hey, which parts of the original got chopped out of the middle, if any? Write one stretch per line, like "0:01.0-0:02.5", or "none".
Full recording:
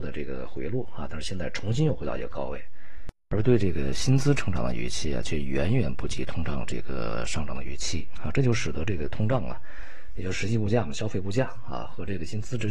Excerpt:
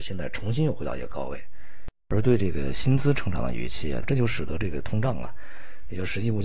0:05.2-0:08.3